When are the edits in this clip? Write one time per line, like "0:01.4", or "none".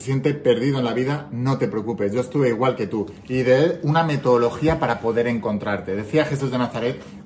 none